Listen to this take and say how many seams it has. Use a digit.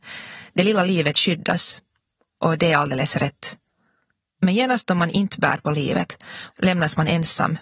1